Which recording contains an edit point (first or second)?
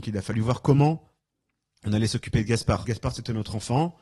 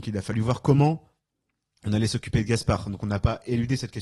first